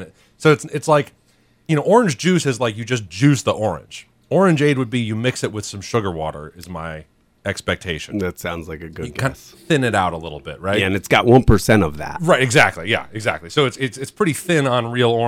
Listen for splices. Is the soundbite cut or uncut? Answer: uncut